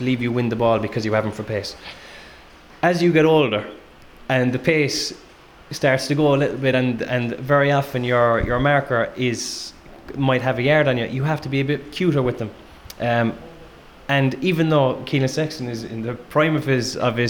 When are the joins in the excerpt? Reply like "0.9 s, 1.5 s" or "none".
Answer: none